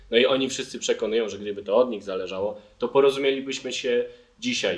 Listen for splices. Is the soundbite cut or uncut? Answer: uncut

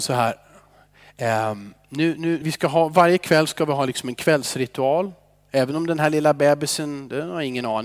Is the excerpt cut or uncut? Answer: cut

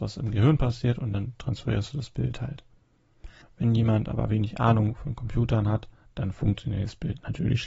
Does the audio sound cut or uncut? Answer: cut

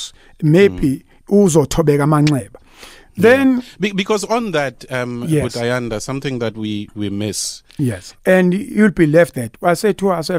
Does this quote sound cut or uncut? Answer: cut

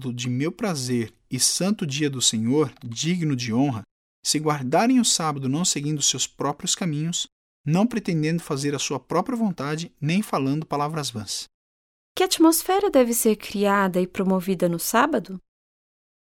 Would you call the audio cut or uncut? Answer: cut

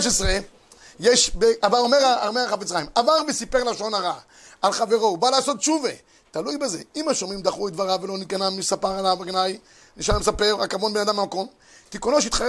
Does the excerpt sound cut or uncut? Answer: uncut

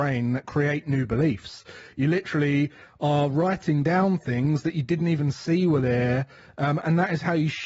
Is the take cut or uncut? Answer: uncut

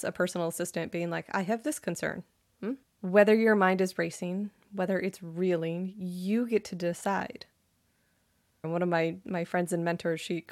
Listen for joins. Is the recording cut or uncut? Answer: cut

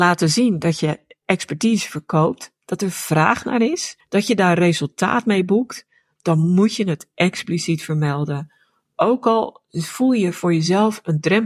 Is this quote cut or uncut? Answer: uncut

